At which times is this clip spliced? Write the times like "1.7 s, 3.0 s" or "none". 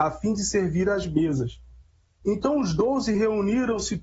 2.2 s

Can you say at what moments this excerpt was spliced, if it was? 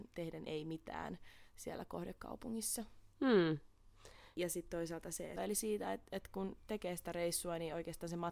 3.1 s, 4.3 s, 5.4 s

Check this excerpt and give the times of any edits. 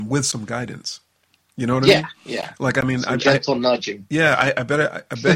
none

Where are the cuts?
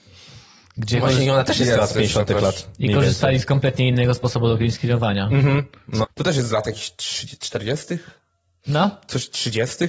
6.0 s

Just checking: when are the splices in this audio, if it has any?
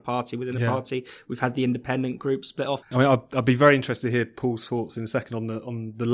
2.8 s

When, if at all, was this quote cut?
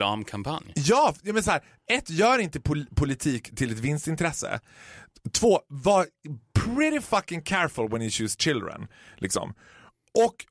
none

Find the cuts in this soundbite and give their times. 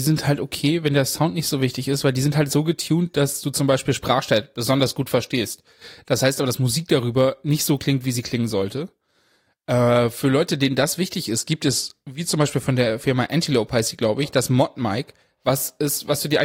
none

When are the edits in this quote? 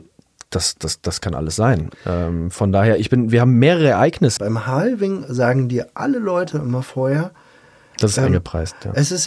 4.4 s

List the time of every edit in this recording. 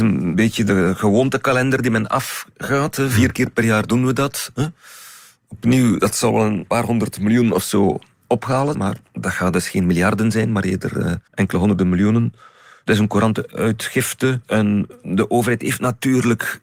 8.7 s, 11.3 s

